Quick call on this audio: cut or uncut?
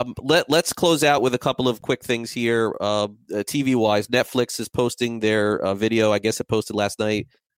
uncut